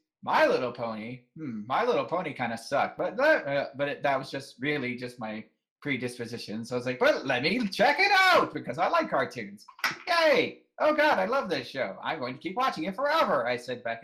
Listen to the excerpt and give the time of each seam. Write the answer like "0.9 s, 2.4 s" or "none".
none